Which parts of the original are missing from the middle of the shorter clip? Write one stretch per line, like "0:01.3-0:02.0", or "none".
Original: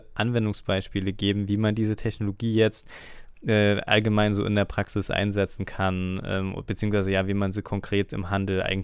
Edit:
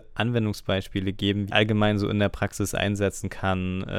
0:01.5-0:03.8